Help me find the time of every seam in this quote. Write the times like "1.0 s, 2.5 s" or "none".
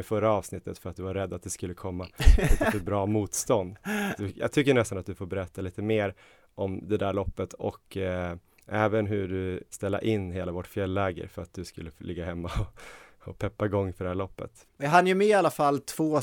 4.2 s, 9.7 s, 14.6 s